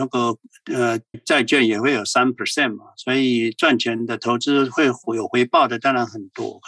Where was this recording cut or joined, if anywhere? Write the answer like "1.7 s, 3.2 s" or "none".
1.1 s